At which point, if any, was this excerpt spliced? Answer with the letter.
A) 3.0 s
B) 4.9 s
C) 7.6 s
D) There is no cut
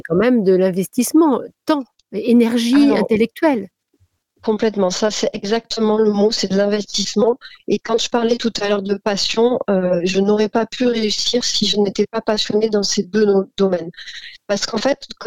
D